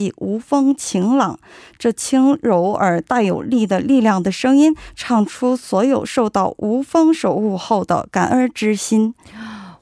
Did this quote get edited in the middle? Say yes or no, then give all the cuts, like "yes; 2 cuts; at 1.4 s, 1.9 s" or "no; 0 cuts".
no; 0 cuts